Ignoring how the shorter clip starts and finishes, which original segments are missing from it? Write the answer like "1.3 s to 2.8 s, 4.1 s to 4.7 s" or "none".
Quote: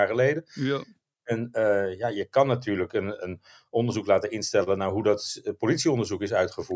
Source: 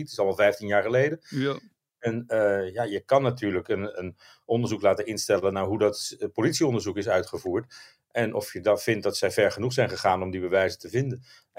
none